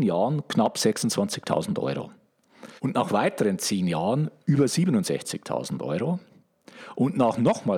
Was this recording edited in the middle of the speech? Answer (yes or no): yes